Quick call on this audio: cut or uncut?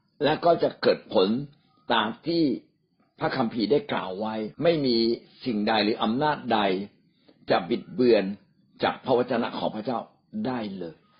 cut